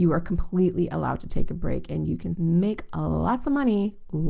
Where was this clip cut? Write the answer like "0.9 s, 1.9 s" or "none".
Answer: 2.3 s